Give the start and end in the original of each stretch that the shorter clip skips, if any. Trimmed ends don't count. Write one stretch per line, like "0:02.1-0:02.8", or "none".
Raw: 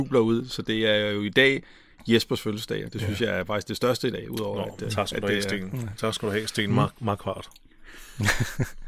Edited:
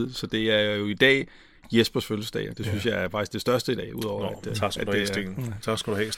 none